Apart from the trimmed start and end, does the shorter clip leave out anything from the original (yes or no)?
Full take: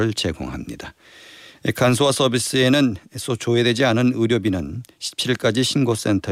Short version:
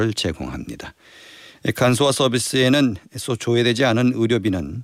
no